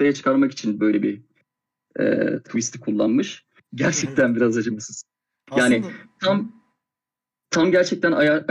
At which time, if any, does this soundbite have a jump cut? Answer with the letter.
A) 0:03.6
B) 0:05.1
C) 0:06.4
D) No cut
A